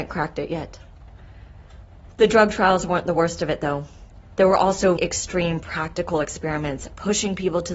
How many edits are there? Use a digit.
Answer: 1